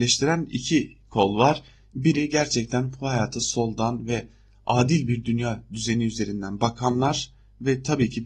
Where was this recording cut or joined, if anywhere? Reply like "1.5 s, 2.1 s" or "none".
none